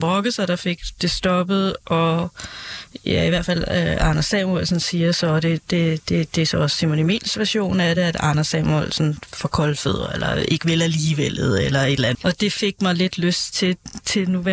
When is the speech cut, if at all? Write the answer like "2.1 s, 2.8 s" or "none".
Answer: 1.8 s, 12.1 s